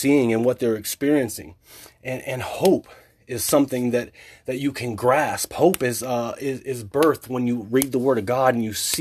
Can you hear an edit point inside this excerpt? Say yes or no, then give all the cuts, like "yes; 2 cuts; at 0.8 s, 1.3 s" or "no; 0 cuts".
no; 0 cuts